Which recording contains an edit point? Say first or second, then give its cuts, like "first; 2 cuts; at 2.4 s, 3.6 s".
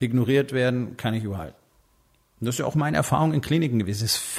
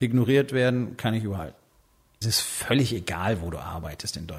second; 1 cut; at 2.2 s